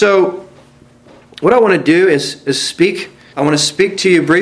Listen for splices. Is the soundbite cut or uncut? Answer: cut